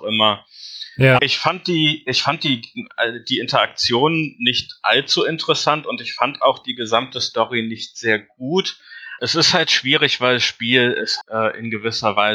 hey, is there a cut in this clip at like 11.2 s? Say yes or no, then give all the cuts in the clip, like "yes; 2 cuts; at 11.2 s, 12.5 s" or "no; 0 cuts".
yes; 3 cuts; at 1.2 s, 9.2 s, 11.2 s